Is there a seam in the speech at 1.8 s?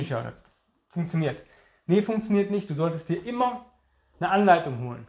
no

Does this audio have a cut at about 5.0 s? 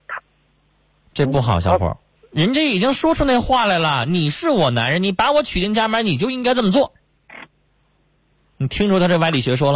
no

